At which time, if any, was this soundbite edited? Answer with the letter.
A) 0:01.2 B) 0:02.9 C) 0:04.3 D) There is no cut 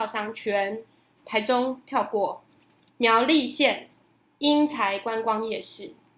A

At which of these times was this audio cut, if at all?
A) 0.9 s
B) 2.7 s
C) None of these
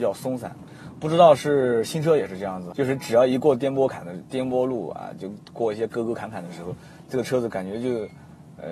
B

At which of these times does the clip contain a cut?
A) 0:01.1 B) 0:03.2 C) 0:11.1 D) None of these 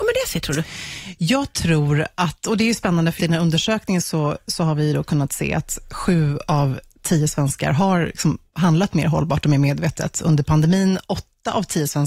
B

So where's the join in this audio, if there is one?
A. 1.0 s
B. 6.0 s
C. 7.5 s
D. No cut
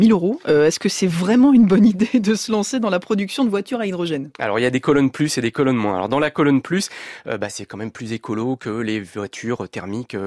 D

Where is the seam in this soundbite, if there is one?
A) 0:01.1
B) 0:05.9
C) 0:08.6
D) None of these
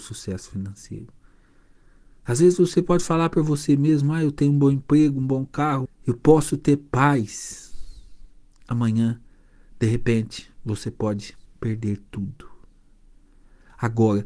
B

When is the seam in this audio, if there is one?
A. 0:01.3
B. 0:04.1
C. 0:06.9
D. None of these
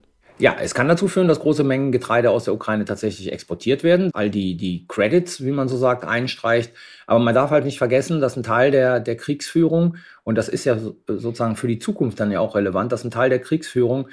B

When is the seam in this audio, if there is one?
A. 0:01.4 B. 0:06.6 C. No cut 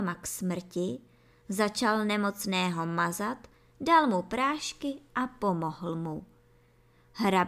C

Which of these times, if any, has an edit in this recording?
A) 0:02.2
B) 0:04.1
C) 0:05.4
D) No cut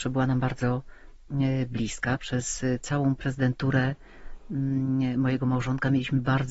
D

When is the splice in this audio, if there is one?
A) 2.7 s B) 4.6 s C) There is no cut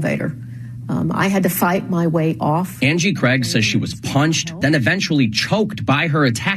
B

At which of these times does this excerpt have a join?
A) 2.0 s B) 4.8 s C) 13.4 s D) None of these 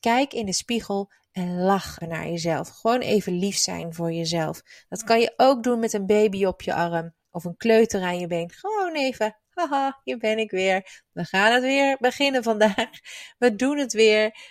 A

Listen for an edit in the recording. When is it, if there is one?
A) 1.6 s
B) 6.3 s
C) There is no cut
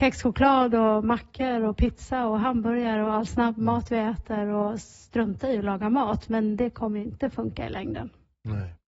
C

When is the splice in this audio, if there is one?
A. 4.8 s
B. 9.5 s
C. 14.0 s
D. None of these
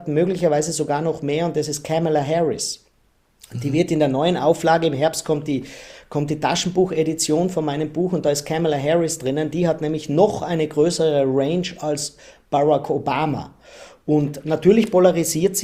D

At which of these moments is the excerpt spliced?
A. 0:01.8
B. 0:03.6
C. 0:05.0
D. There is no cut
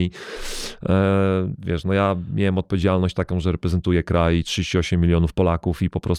D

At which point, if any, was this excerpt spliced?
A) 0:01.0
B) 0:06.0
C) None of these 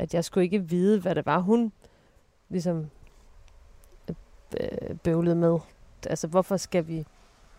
B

